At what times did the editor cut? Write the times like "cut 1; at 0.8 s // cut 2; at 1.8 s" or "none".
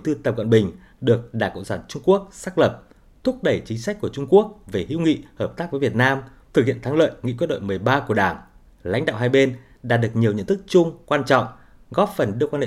cut 1; at 6.4 s // cut 2; at 8.7 s